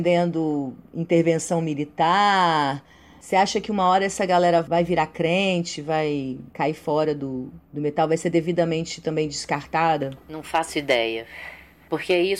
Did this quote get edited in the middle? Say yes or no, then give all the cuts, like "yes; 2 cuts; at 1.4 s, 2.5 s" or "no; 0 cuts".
no; 0 cuts